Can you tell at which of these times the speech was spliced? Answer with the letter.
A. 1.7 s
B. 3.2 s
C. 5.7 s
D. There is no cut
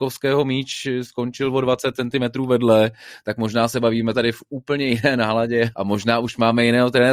C